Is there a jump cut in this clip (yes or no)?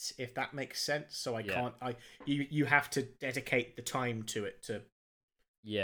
no